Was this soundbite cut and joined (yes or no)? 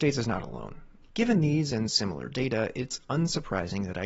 yes